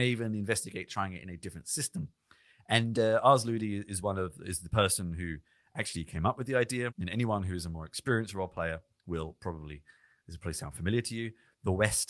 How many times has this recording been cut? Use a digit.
1